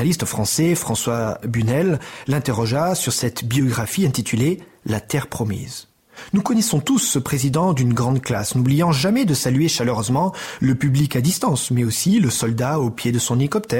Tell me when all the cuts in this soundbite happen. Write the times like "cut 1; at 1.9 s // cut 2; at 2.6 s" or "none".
none